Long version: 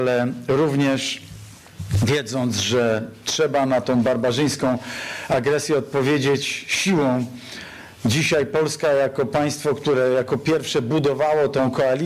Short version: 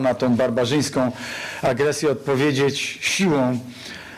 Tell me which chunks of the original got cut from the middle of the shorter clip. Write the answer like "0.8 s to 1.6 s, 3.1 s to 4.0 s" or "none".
none